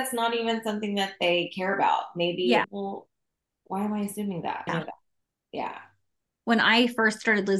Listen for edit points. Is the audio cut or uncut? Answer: cut